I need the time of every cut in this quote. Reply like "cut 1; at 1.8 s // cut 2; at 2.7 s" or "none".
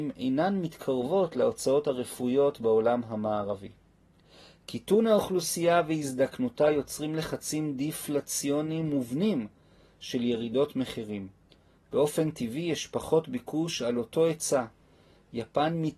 none